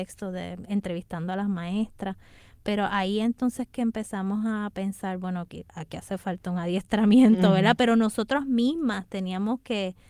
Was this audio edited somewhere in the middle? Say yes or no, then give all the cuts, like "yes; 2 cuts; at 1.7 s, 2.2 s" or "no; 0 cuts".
no; 0 cuts